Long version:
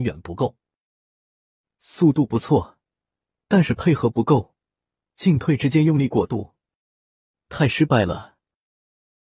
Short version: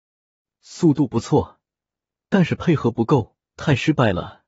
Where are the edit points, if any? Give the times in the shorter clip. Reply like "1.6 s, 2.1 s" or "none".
3.5 s